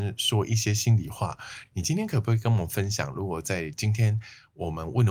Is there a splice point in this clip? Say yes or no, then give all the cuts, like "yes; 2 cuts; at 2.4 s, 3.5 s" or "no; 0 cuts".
no; 0 cuts